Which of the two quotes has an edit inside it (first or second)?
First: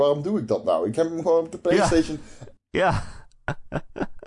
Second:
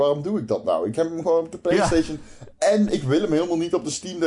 first